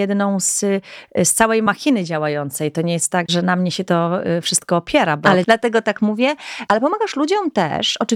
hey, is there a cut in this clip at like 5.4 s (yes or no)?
yes